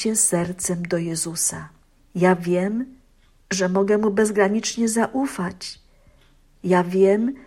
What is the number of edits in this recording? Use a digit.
1